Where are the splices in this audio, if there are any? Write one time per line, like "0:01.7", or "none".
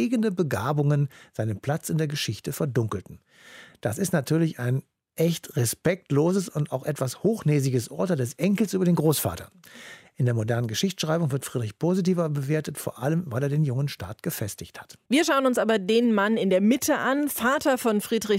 0:15.1